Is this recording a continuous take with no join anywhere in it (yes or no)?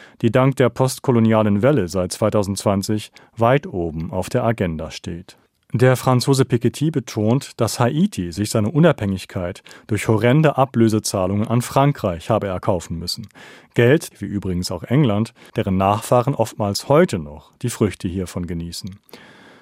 no